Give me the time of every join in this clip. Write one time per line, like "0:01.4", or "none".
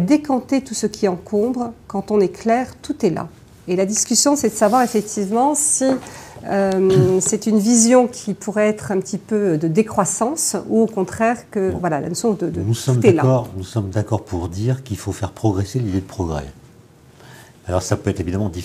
0:01.8
0:12.5
0:17.5